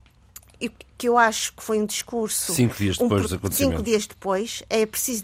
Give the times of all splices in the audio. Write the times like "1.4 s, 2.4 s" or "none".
none

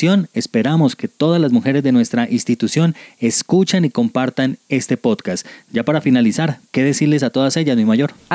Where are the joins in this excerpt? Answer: none

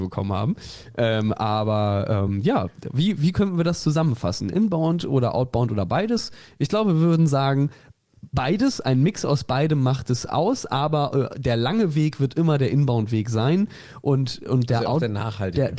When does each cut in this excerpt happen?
none

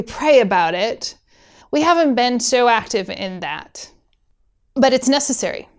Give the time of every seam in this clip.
1.6 s

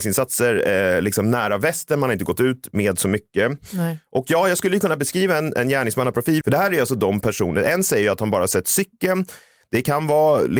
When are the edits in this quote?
6.4 s, 9.6 s

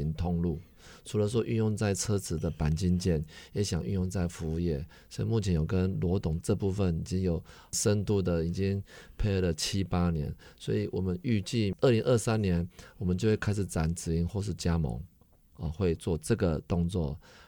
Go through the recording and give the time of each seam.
none

